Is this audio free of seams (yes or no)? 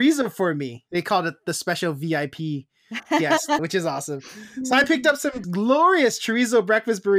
no